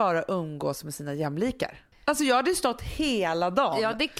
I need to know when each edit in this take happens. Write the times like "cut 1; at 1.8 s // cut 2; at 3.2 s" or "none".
cut 1; at 1.9 s